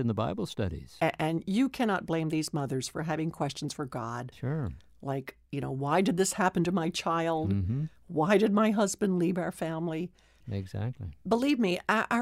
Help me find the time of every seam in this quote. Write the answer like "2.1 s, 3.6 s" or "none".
10.4 s